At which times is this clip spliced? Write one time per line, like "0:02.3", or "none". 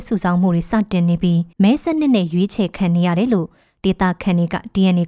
0:01.5